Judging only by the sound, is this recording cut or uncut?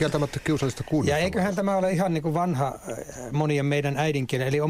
uncut